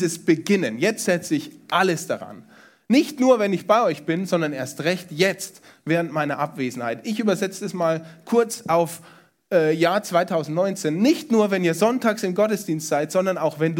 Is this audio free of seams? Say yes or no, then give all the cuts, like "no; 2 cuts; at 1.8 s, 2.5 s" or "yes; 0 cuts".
yes; 0 cuts